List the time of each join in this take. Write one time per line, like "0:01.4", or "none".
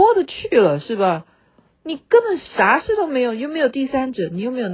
none

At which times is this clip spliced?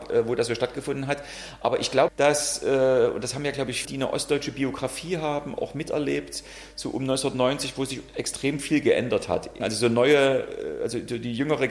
0:02.1
0:03.8
0:09.6

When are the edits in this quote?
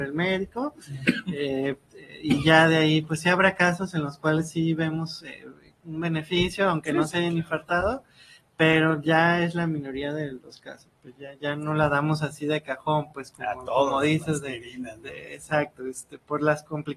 none

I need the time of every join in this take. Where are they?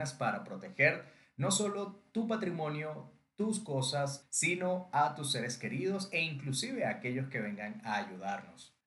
0:04.2

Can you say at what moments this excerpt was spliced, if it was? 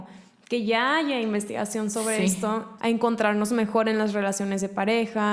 0:02.8

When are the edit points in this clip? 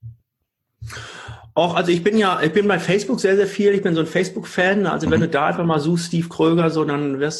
none

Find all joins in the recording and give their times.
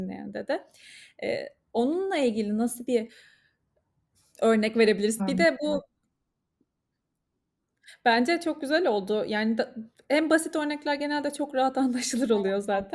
0:05.2

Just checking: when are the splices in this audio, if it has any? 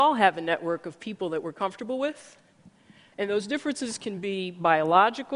0:03.1

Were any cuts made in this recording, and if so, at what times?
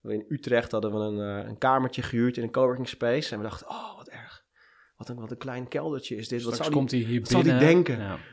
none

